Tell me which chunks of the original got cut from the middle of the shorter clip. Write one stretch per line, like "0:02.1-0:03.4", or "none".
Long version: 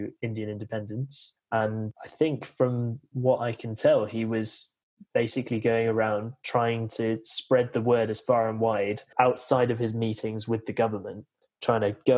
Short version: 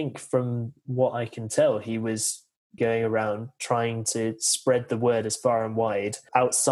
0:05.0-0:05.6